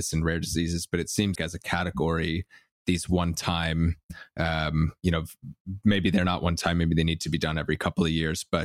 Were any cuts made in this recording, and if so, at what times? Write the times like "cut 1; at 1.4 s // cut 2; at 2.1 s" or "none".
cut 1; at 1.4 s